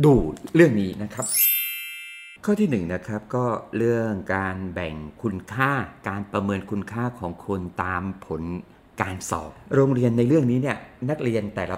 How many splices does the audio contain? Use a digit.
1